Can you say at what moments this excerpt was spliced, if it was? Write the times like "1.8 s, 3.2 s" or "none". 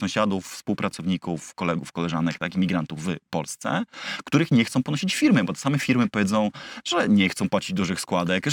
none